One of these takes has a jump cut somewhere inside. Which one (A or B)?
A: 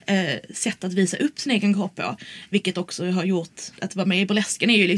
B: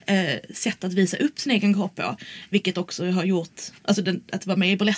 A